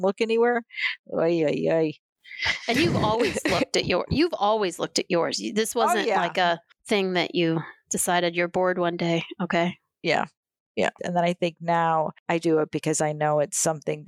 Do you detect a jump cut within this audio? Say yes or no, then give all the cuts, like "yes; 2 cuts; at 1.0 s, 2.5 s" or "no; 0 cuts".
yes; 2 cuts; at 11.0 s, 12.4 s